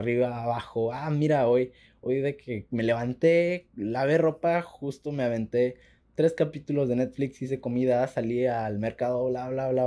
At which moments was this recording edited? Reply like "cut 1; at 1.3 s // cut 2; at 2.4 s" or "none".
none